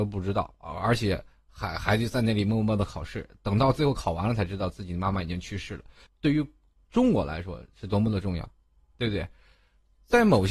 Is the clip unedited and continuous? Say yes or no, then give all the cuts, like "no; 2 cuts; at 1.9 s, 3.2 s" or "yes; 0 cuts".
no; 1 cut; at 6.1 s